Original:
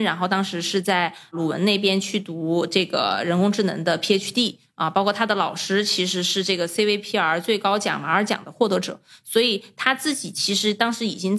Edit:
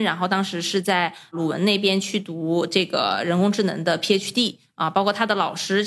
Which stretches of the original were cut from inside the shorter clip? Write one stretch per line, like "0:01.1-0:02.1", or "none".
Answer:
none